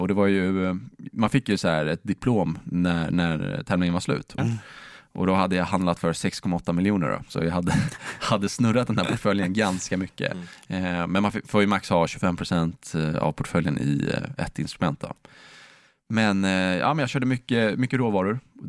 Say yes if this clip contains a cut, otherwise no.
yes